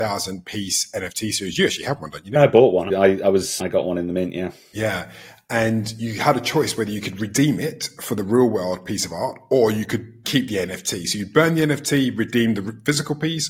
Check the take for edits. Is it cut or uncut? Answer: uncut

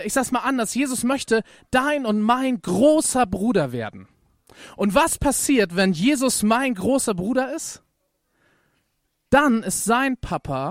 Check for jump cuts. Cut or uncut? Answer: uncut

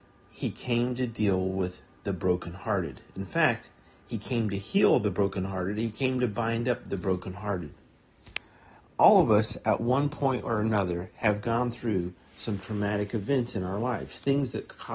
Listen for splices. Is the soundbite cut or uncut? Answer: uncut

